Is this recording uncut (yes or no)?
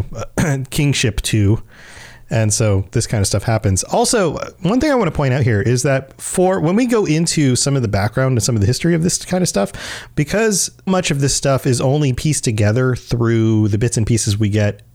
no